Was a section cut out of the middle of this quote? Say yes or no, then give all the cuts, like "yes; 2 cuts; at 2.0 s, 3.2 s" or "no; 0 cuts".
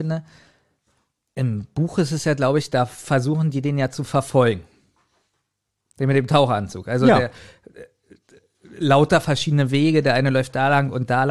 no; 0 cuts